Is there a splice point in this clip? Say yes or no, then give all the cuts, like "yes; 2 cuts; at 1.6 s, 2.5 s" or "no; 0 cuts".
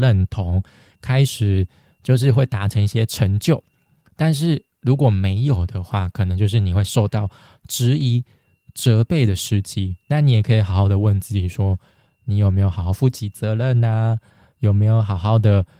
no; 0 cuts